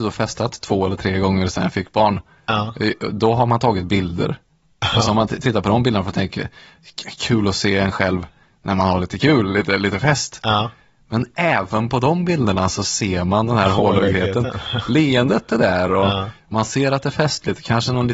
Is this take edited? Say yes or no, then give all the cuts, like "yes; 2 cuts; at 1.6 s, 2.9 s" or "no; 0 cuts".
no; 0 cuts